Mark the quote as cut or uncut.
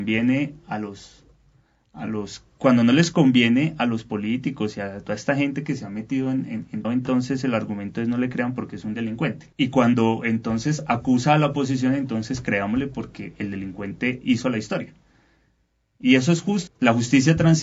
cut